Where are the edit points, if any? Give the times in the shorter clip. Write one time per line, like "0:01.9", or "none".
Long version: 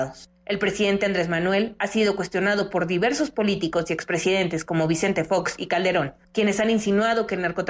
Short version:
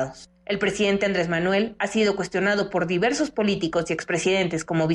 none

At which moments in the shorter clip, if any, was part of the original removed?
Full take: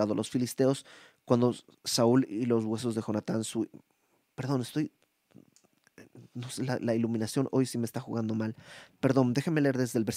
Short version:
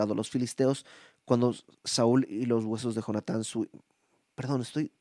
none

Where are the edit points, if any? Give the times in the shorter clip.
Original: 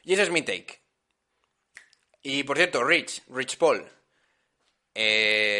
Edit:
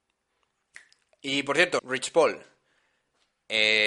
0:01.8

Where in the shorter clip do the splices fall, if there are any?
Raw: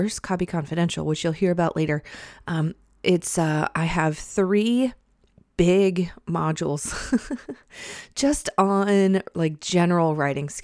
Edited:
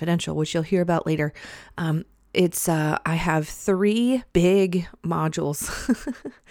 0:04.3

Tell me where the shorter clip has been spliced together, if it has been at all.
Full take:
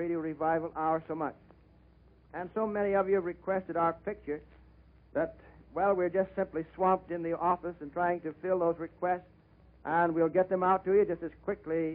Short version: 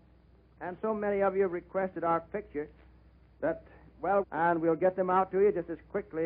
0:04.2

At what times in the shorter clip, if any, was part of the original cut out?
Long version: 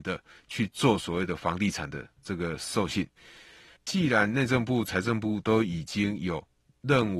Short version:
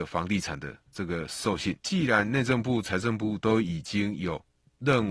0:01.8

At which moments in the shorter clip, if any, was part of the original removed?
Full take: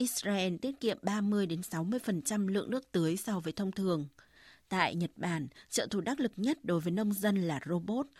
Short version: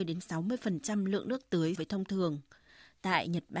0:01.7

